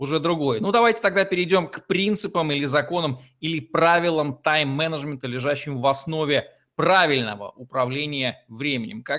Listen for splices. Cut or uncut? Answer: uncut